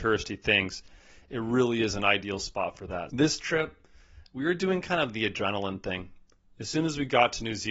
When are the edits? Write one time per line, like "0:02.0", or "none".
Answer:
0:03.1